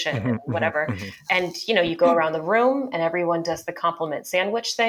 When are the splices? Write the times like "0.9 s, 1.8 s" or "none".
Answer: 1.3 s